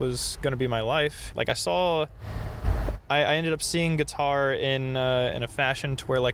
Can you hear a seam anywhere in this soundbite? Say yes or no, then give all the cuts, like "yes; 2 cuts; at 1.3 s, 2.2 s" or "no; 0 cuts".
yes; 1 cut; at 1.3 s